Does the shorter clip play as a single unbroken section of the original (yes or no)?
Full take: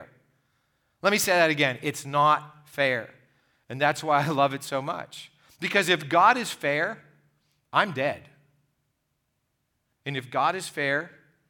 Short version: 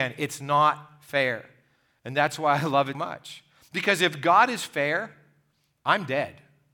no